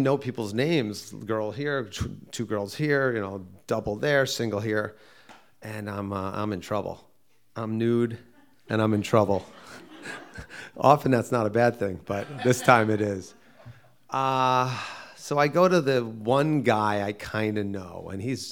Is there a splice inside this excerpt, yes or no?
no